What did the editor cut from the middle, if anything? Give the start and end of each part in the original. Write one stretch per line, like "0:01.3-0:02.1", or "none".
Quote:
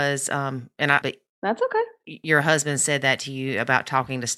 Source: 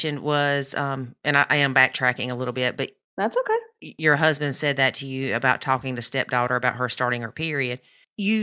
0:01.5-0:02.8